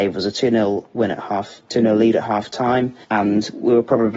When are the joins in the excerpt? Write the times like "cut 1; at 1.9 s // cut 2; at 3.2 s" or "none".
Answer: cut 1; at 3.0 s